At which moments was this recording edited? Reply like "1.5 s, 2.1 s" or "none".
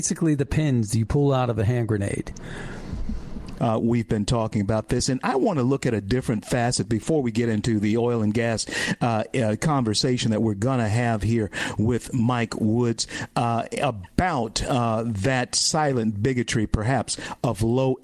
3.6 s